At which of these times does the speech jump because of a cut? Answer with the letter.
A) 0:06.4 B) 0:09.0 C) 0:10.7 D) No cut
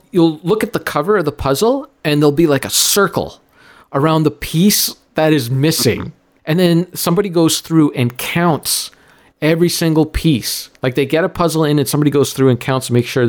A